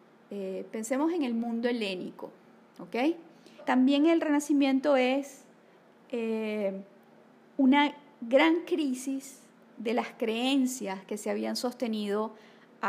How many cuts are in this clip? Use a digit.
1